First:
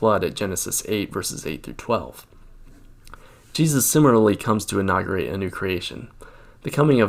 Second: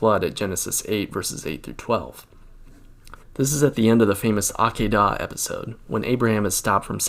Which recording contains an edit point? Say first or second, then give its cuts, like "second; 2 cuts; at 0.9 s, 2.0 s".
second; 1 cut; at 3.2 s